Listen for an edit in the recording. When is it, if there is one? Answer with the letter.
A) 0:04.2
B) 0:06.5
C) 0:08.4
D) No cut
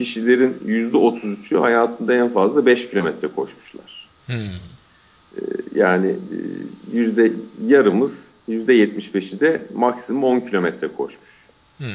C